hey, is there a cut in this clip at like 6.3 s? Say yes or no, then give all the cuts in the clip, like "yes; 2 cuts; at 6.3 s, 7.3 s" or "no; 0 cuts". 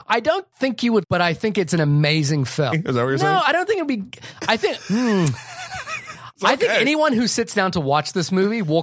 no; 2 cuts; at 1.0 s, 2.7 s